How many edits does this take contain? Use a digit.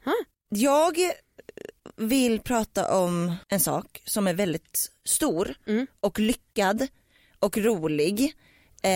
1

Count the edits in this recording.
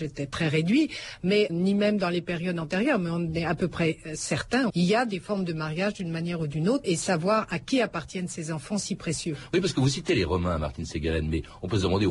3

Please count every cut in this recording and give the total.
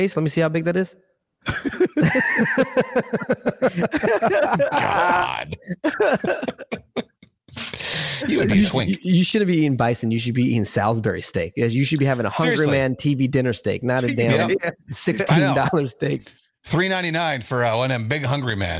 0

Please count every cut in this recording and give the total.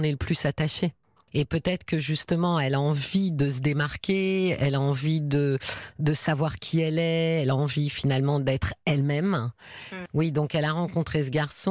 2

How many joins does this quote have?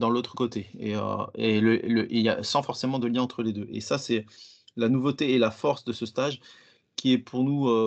0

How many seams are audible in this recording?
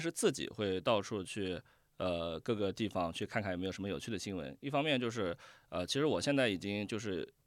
0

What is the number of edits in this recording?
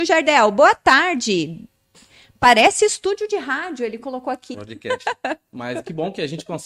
1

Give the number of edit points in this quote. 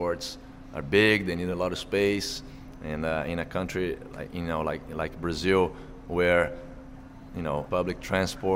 1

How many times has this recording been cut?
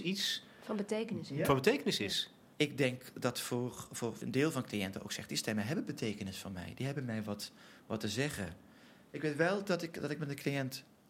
1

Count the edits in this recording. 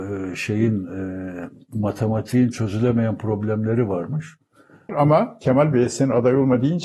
1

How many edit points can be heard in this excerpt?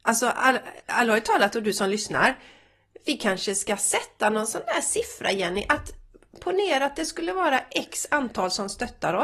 0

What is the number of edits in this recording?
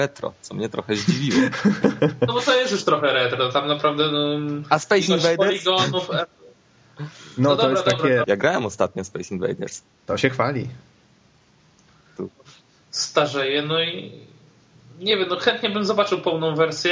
2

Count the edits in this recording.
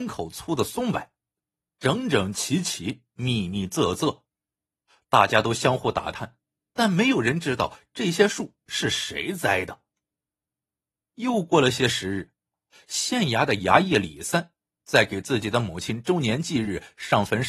0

